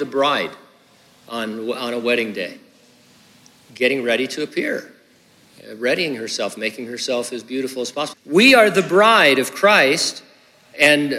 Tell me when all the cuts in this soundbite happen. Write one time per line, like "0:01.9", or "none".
0:08.1